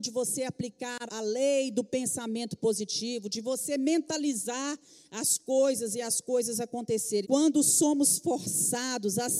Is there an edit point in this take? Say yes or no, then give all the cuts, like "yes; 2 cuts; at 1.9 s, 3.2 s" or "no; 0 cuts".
yes; 2 cuts; at 1.1 s, 7.2 s